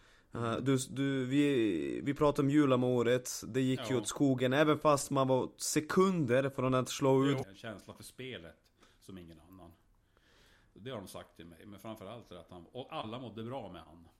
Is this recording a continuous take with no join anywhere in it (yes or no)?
no